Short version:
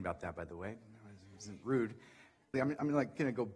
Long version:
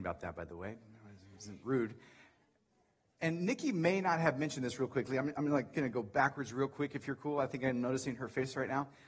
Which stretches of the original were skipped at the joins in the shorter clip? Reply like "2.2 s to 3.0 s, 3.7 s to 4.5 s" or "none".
2.5 s to 5.1 s

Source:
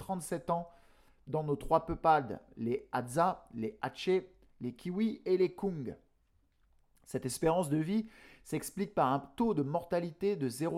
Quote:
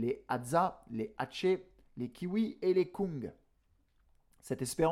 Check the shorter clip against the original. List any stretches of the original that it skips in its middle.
none

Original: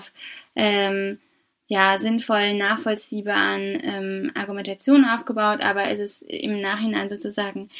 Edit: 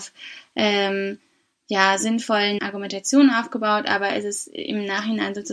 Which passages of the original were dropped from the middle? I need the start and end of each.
2.6 s to 4.3 s

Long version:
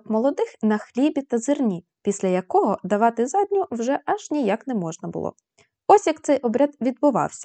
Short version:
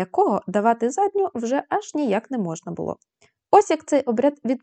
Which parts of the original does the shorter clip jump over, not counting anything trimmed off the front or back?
none

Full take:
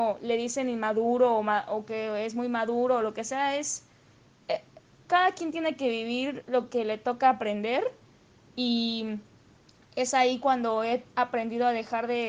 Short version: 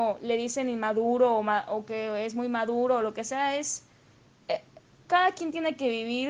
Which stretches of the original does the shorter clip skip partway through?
none

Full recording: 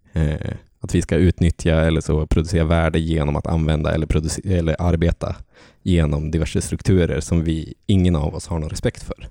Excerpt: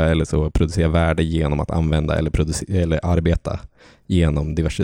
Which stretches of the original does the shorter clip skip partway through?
none

